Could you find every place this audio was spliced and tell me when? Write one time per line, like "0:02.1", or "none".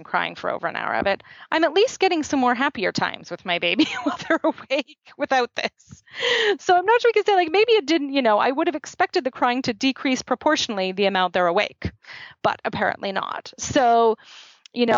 none